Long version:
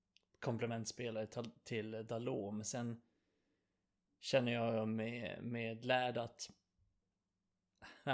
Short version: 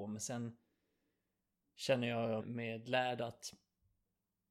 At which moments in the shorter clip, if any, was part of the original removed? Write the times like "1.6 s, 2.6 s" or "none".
2.4 s